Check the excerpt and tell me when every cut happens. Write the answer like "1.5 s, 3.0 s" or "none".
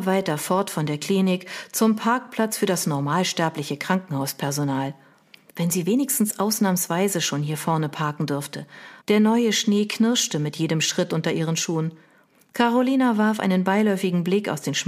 9.0 s